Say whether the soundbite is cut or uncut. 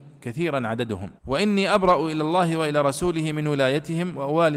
cut